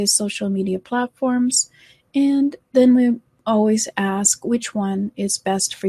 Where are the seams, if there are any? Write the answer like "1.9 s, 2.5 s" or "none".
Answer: none